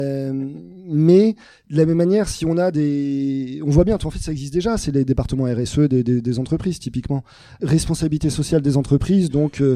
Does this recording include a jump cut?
yes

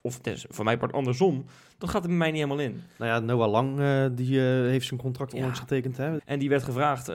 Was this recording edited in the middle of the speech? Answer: yes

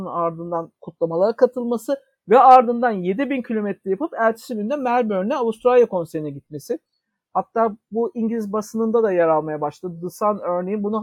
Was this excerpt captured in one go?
yes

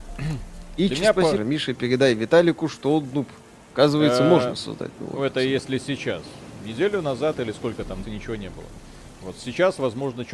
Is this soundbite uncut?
no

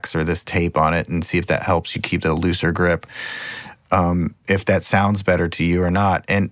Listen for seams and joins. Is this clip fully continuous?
yes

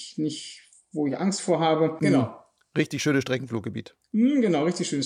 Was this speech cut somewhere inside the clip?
yes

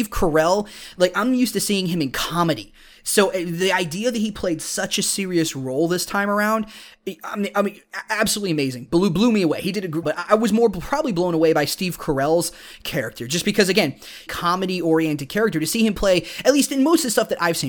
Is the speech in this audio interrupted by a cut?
yes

